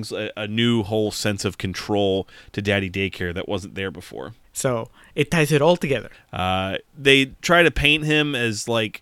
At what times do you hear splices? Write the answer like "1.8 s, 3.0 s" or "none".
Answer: 4.4 s, 6.1 s